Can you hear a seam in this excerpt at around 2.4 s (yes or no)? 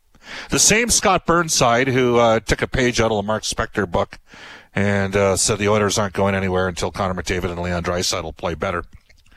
no